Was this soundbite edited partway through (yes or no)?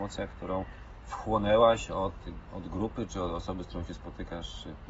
no